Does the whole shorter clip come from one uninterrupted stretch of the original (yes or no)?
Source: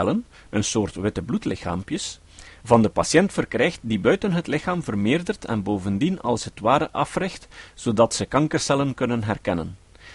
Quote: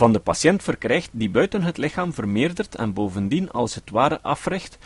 yes